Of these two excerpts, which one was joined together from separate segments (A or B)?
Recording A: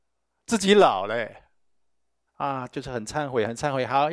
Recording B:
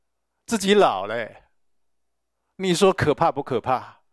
A